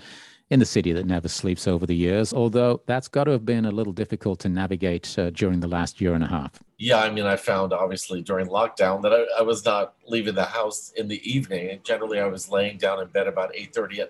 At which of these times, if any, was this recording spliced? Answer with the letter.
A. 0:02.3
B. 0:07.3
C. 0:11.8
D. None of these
D